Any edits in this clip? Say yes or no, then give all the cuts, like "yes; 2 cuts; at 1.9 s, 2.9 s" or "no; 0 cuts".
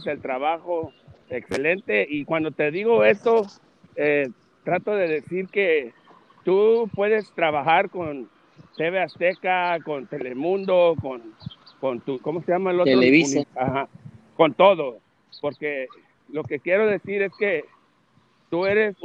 yes; 2 cuts; at 12.2 s, 13.4 s